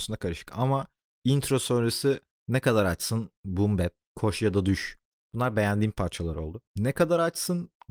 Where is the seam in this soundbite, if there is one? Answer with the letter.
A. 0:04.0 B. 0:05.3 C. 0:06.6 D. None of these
A